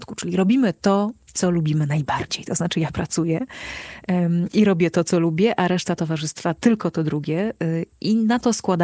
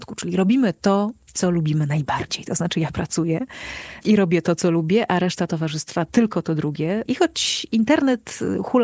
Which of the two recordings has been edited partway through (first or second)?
second